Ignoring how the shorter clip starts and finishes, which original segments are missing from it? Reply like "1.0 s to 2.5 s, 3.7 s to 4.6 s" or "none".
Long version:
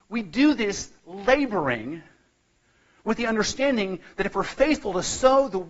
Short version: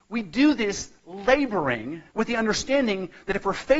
2.1 s to 3.0 s